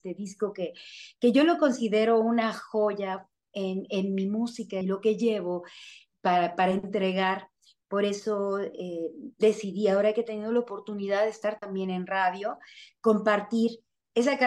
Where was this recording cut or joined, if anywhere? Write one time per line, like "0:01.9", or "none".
0:04.8